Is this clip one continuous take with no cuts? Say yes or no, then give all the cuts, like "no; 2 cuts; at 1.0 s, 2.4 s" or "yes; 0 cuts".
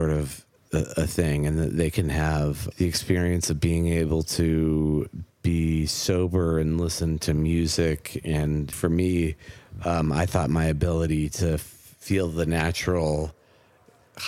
no; 2 cuts; at 2.7 s, 8.7 s